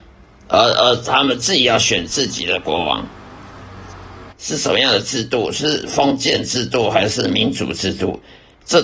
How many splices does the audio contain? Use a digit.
1